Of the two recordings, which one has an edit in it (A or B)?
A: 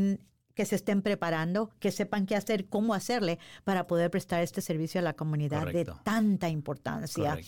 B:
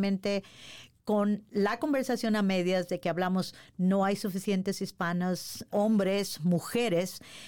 B